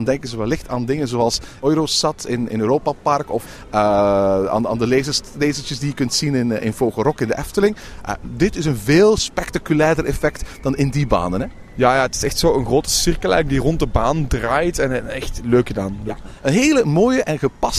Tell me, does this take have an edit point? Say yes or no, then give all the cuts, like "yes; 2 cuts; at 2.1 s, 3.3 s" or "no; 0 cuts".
no; 0 cuts